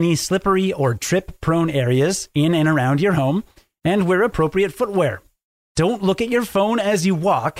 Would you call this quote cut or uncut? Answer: uncut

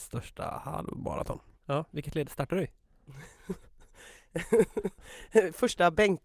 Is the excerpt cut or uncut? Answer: cut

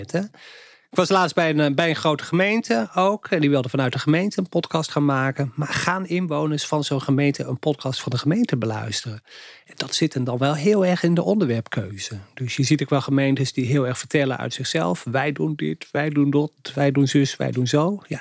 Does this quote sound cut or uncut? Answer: uncut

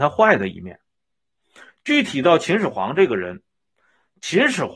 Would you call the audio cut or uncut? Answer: uncut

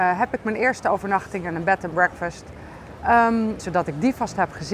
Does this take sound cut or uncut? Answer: cut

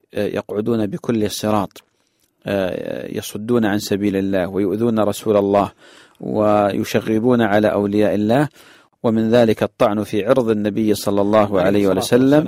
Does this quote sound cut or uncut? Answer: uncut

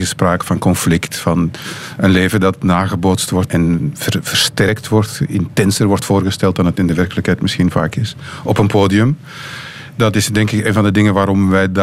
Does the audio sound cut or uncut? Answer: cut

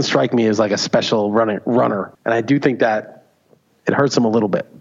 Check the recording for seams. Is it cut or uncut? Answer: cut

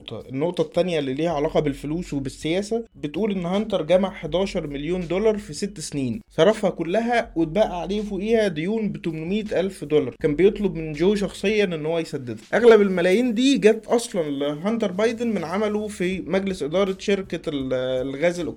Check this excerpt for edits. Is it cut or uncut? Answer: uncut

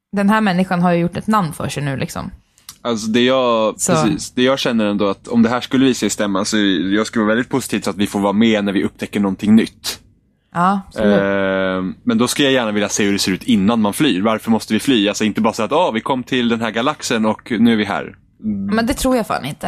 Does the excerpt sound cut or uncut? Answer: cut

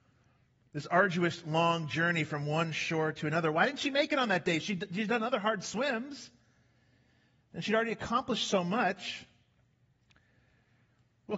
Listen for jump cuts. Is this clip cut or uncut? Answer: uncut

